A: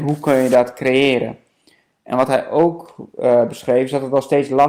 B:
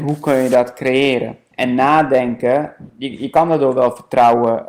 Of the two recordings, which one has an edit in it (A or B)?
B